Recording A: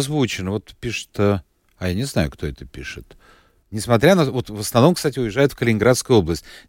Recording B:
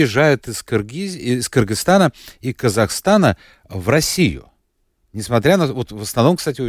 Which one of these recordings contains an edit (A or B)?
A